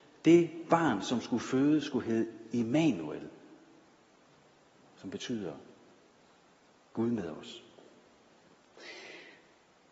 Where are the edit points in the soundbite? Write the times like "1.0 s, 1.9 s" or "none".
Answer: none